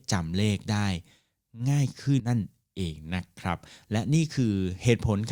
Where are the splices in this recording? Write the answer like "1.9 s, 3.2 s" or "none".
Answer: 2.2 s